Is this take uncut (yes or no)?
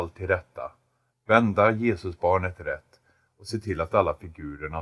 no